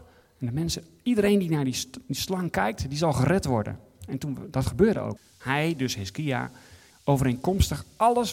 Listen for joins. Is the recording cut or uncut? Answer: cut